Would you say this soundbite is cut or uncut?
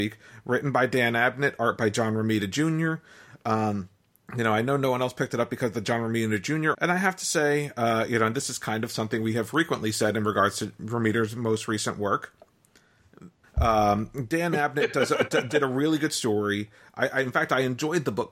cut